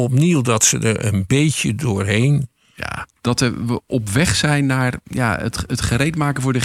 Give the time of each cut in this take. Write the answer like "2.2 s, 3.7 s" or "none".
3.2 s